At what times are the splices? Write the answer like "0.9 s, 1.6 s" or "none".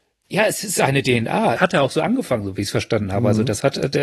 1.6 s